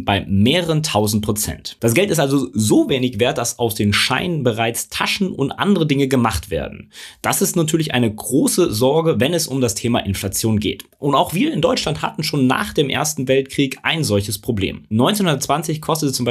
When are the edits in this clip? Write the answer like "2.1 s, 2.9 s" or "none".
none